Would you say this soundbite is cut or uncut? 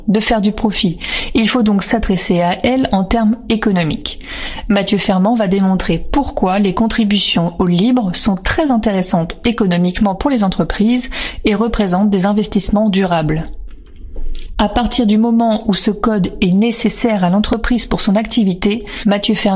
cut